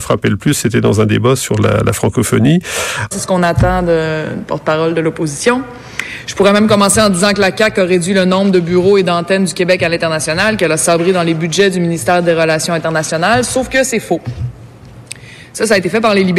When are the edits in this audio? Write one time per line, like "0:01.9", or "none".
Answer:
0:03.1